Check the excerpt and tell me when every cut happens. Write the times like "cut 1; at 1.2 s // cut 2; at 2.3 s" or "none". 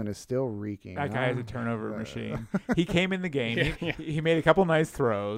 cut 1; at 3.7 s